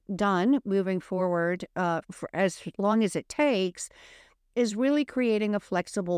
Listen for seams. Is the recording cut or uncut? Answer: cut